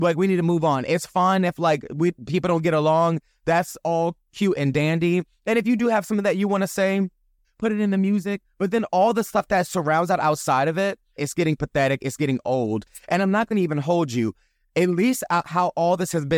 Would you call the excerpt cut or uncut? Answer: cut